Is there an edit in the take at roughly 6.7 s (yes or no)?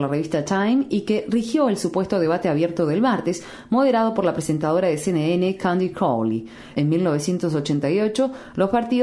yes